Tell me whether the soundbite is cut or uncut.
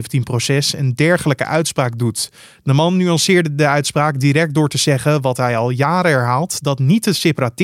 uncut